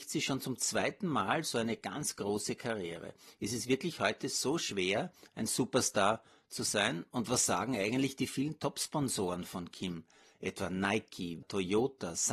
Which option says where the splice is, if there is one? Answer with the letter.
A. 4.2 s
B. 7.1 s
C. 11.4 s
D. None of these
C